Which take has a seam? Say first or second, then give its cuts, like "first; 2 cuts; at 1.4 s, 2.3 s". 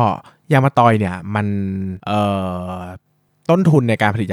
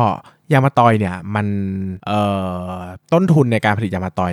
second; 1 cut; at 3.0 s